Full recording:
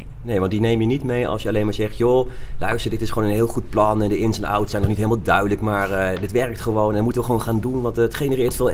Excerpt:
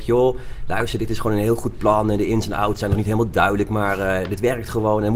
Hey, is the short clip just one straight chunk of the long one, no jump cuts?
yes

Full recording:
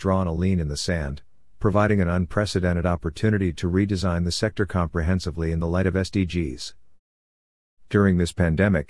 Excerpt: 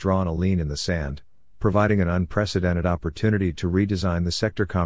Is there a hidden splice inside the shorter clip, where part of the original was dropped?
no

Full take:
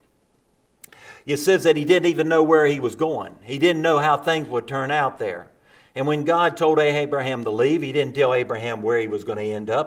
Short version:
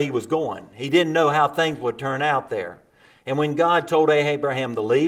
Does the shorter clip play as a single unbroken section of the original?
yes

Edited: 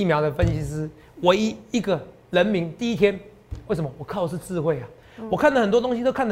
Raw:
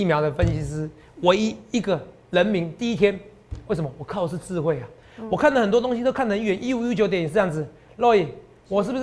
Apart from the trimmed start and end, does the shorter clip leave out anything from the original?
no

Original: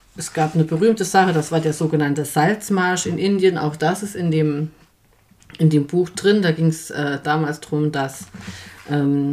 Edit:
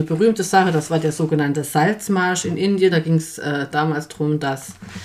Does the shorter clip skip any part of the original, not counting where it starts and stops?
yes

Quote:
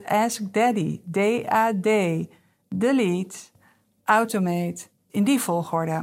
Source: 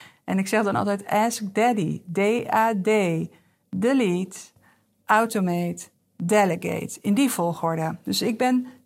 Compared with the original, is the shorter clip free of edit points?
no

